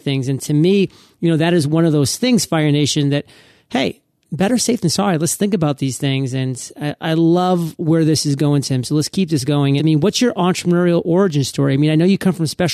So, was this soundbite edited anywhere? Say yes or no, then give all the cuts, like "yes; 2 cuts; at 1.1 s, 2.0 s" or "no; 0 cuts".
yes; 1 cut; at 9.8 s